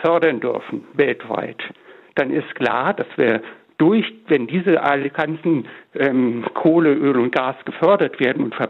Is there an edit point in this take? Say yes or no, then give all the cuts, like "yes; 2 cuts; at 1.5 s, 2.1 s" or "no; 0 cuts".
no; 0 cuts